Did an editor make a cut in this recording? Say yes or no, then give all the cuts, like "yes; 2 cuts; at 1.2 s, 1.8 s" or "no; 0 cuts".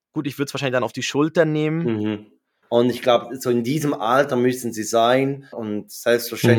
yes; 2 cuts; at 2.6 s, 5.5 s